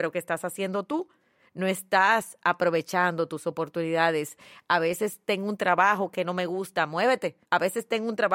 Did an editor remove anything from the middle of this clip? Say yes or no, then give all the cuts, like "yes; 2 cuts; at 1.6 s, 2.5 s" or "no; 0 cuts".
yes; 1 cut; at 7.4 s